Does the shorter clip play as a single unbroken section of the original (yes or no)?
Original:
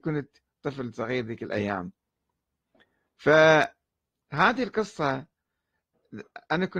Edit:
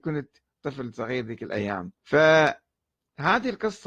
no